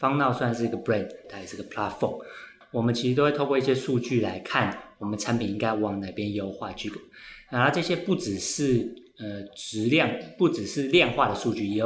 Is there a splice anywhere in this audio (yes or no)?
yes